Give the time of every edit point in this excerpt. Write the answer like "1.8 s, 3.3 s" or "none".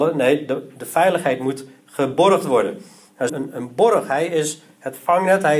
3.3 s